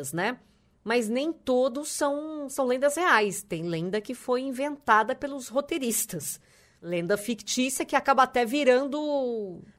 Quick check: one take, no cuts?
yes; 0 cuts

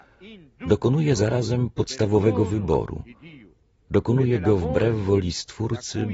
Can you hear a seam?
no; 0 cuts

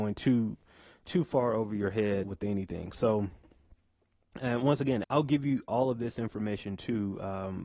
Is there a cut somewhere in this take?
yes; 2 cuts; at 2.2 s, 5.0 s

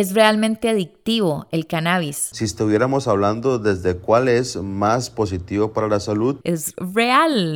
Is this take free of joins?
no; 2 cuts; at 2.3 s, 6.4 s

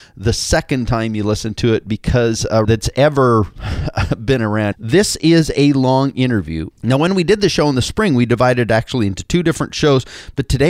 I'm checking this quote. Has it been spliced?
yes; 3 cuts; at 2.6 s, 4.7 s, 6.7 s

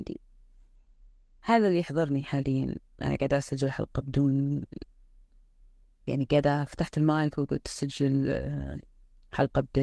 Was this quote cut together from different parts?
no; 0 cuts

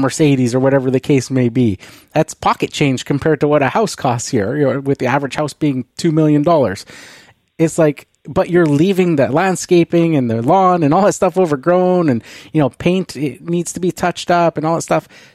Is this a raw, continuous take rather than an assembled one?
yes; 0 cuts

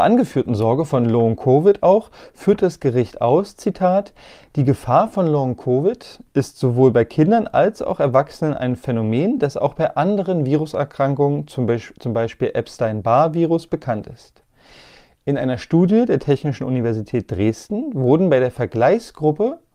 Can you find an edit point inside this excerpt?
no; 0 cuts

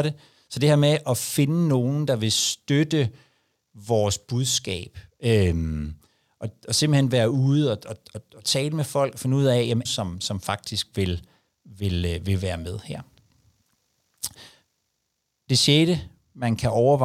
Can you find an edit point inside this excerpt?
yes; 1 cut; at 9.9 s

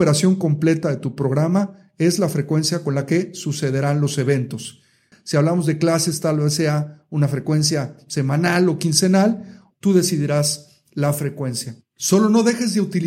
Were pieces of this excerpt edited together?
yes; 2 cuts; at 5.1 s, 9.7 s

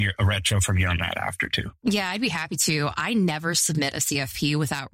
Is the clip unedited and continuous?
no; 1 cut; at 1.8 s

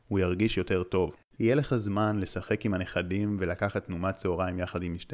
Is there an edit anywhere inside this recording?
yes; 1 cut; at 1.3 s

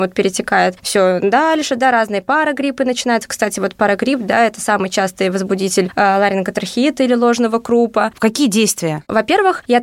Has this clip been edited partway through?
yes; 1 cut; at 8.1 s

